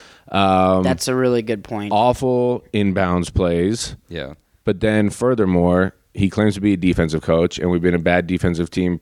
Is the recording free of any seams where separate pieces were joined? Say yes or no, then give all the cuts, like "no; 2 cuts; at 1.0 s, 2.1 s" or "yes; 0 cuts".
yes; 0 cuts